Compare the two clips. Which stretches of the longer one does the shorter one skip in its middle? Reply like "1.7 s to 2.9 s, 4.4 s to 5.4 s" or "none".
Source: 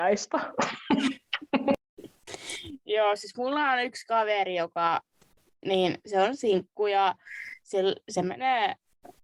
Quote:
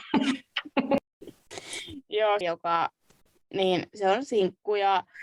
3.2 s to 4.5 s